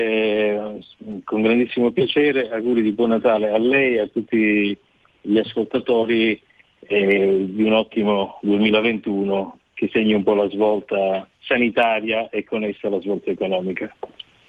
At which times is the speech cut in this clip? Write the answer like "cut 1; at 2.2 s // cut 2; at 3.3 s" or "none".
none